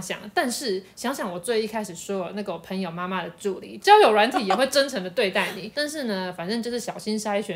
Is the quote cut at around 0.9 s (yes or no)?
no